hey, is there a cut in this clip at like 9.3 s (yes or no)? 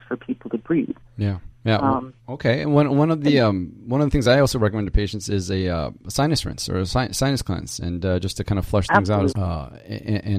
yes